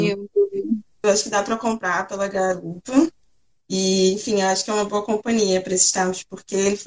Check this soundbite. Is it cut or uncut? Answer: cut